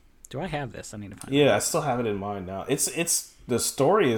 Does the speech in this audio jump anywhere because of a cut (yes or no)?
no